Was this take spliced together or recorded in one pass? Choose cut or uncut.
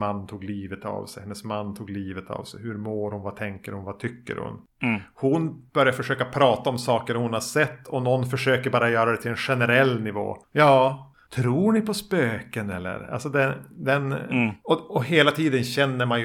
uncut